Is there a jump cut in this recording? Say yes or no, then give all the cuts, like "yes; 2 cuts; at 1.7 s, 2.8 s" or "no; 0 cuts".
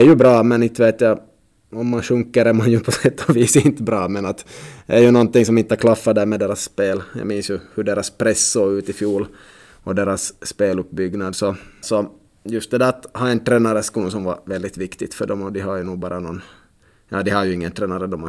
yes; 1 cut; at 11.8 s